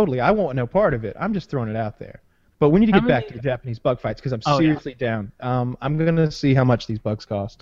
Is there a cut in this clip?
no; 0 cuts

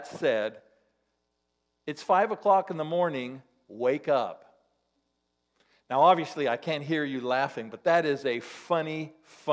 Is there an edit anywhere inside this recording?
no; 0 cuts

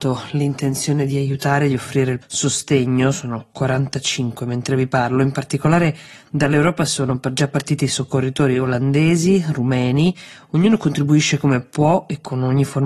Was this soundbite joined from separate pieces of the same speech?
yes; 1 cut; at 2.2 s

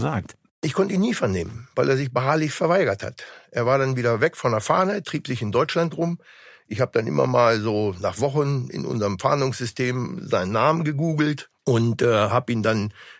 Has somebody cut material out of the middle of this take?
no; 0 cuts

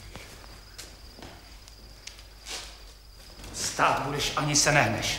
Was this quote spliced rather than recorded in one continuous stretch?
no; 0 cuts

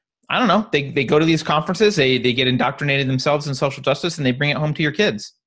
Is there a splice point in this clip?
no; 0 cuts

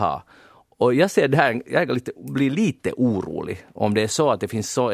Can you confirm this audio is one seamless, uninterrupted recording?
yes; 0 cuts

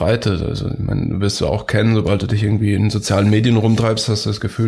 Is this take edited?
no; 0 cuts

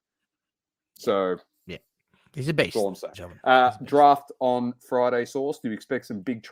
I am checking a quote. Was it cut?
yes; 1 cut; at 3.1 s

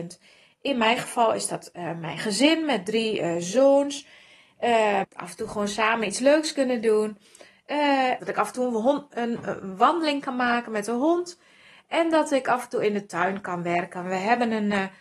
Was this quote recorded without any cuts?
no; 2 cuts; at 5.0 s, 8.2 s

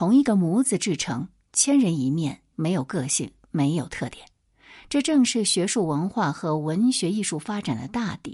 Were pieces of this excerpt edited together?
yes; 1 cut; at 2.5 s

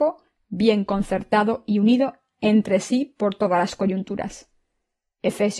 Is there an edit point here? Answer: no; 0 cuts

